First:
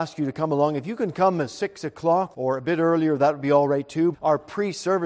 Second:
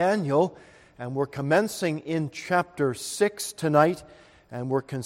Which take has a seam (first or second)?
first